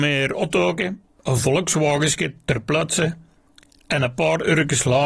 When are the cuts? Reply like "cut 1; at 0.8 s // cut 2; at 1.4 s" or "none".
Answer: none